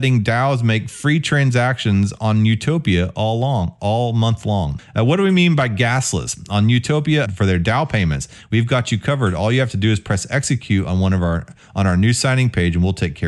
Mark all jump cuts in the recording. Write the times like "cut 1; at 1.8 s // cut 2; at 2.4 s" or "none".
cut 1; at 4.8 s // cut 2; at 7.2 s